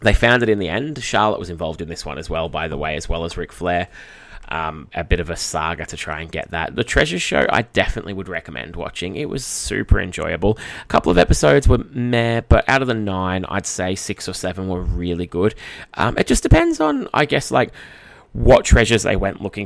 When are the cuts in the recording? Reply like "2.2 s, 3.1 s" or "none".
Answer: 4.9 s